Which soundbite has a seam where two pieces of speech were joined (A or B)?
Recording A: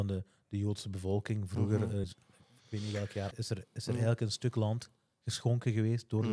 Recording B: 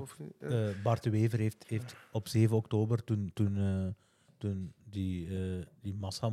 A